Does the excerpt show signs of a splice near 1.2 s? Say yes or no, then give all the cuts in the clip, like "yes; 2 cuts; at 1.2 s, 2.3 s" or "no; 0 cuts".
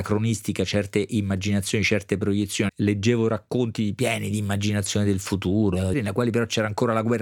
no; 2 cuts; at 2.7 s, 5.9 s